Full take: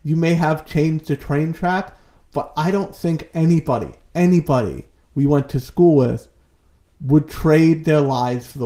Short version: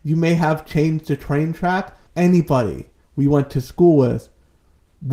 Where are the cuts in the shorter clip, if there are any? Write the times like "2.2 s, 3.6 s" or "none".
2.1 s

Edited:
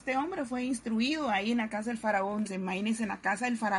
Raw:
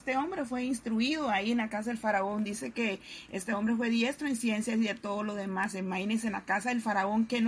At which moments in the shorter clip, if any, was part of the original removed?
2.5 s

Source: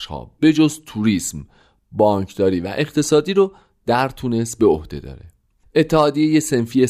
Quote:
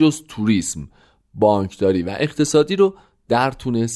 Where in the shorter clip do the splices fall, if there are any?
none

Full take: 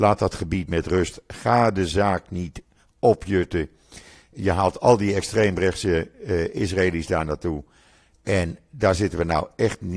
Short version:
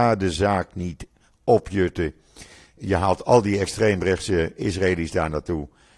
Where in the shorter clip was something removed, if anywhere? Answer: 4.6 s

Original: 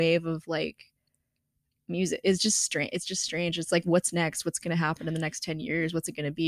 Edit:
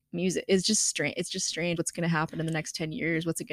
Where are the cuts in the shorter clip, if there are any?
1.8 s

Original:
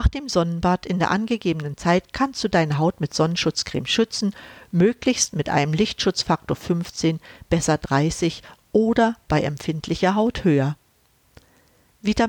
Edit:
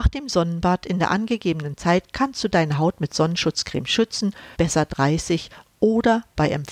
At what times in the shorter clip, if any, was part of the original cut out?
4.5 s

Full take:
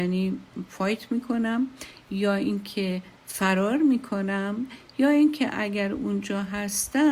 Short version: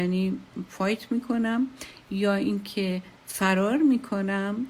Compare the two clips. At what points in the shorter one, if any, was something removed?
none

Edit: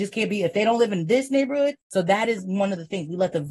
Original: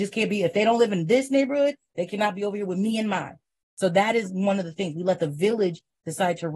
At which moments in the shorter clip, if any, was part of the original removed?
1.8 s

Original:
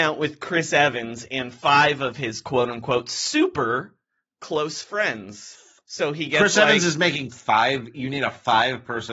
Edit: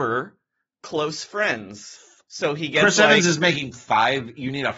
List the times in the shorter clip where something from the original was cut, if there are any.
none

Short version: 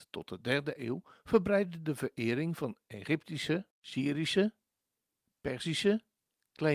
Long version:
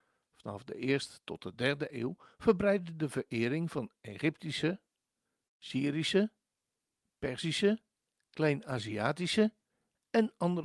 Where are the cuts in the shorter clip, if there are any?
3.7 s

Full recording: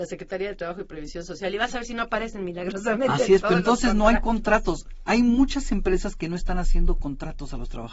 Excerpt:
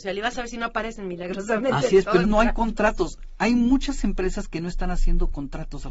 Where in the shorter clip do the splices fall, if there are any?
2.2 s

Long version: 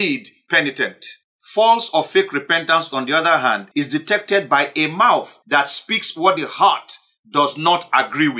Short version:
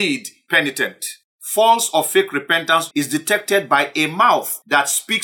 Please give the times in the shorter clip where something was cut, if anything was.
2.9 s

